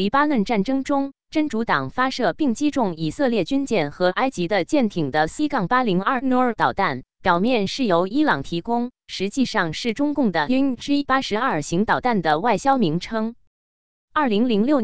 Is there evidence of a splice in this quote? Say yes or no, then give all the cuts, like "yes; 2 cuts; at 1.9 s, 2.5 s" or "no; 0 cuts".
no; 0 cuts